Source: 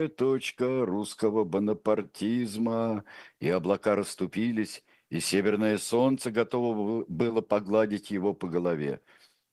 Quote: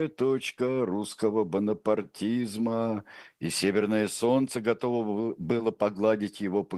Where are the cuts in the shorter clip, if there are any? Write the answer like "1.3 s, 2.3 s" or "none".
3.3 s